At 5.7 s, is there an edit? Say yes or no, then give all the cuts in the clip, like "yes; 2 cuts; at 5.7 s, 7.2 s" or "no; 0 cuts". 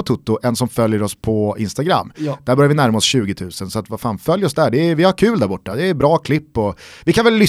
no; 0 cuts